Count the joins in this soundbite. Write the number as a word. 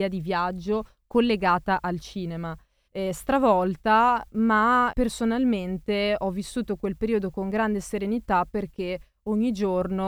two